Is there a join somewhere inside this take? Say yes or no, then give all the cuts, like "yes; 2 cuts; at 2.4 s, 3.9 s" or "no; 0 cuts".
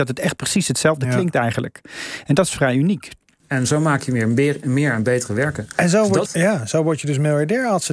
yes; 2 cuts; at 3.4 s, 6.3 s